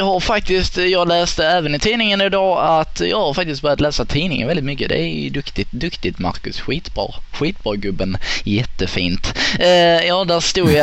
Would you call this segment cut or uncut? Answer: uncut